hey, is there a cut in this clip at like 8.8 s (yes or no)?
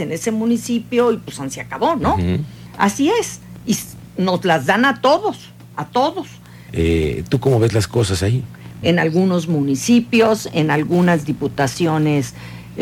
yes